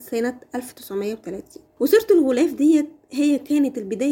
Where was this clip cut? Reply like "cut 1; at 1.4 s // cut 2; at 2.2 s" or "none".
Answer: cut 1; at 1.7 s